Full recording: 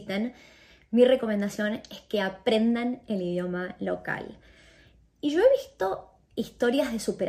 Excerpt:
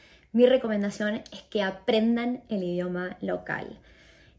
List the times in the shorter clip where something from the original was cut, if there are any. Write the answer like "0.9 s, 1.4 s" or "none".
none